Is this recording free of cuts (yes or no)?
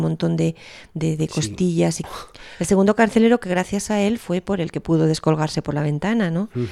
no